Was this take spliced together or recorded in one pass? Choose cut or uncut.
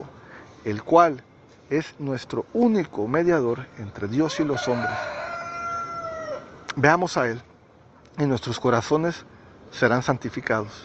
uncut